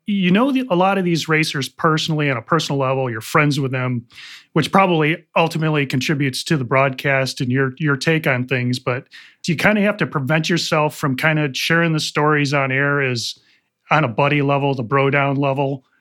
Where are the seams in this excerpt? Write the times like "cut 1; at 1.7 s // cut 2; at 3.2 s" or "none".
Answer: none

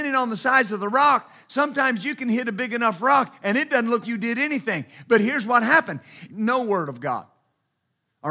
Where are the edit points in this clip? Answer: cut 1; at 4.0 s // cut 2; at 6.3 s

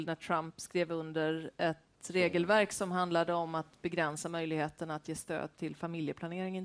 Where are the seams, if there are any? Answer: none

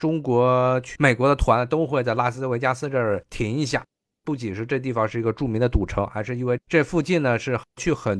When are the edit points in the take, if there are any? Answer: none

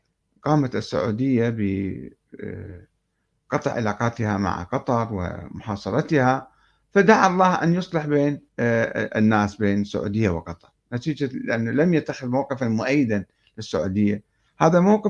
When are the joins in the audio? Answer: cut 1; at 8.5 s

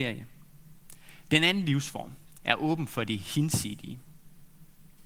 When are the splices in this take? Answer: cut 1; at 1.3 s // cut 2; at 2.3 s

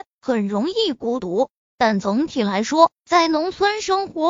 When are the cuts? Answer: cut 1; at 1.6 s

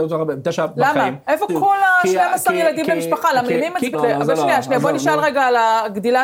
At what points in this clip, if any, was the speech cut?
cut 1; at 1.5 s // cut 2; at 3.9 s

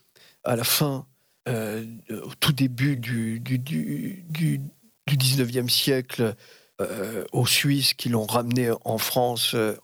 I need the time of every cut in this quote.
none

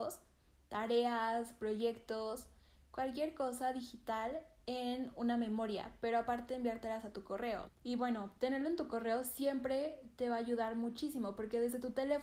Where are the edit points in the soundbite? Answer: cut 1; at 7.7 s

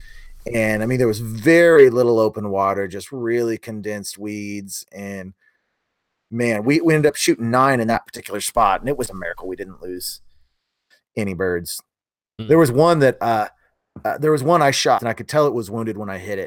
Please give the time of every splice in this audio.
cut 1; at 9.1 s // cut 2; at 15.0 s

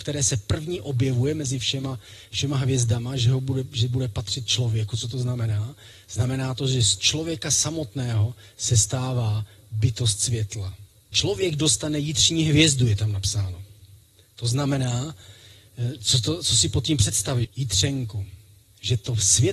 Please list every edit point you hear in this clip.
cut 1; at 11.1 s // cut 2; at 17.4 s

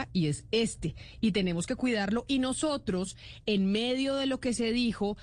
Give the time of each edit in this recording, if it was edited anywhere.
none

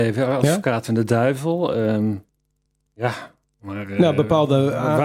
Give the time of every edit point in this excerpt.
none

